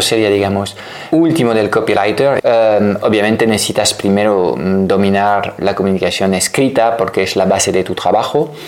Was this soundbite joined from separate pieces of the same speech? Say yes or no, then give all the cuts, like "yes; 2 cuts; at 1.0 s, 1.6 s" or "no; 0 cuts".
yes; 3 cuts; at 1.1 s, 2.4 s, 5.6 s